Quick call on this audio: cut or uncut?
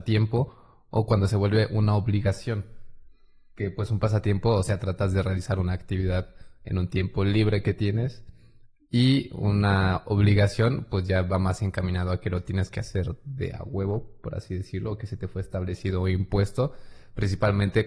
uncut